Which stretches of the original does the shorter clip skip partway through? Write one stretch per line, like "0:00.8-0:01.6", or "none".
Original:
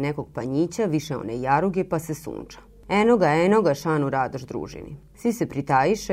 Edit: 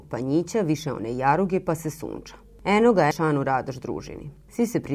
0:03.3-0:03.8